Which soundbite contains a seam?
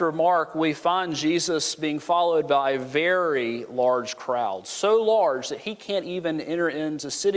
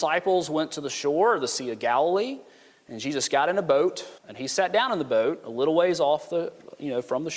second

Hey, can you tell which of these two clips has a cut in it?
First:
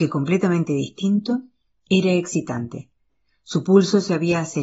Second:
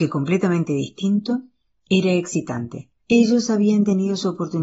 second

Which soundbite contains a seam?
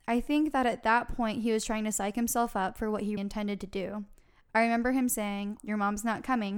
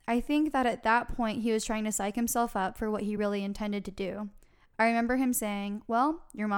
first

